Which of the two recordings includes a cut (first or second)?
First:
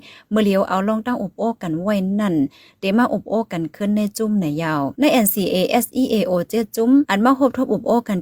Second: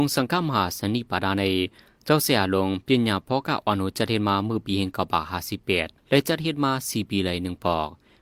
second